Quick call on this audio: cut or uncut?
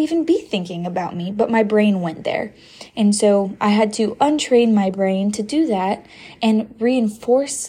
uncut